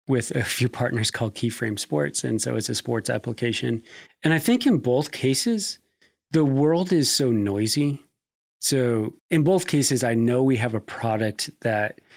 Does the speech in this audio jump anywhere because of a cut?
yes; 2 cuts; at 4.1 s, 9.2 s

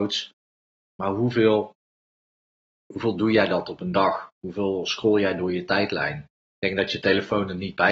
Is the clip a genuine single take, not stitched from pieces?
yes; 0 cuts

